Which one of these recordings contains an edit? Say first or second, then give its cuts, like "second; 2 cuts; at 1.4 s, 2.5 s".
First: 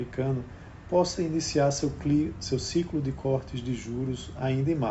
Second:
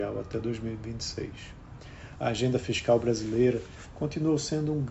second; 1 cut; at 2.2 s